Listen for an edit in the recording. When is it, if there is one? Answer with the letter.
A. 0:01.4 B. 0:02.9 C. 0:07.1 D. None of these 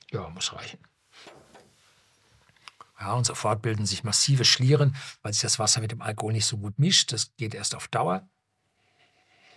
B